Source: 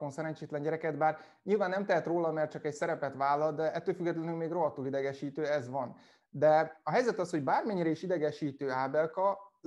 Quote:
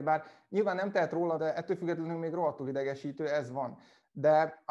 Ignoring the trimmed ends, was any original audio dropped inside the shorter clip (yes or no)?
yes